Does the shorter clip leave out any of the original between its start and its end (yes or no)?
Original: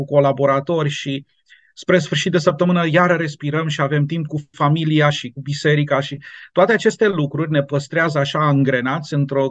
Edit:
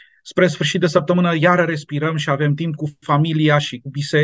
no